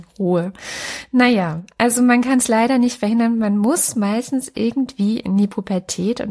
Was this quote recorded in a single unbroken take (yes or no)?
yes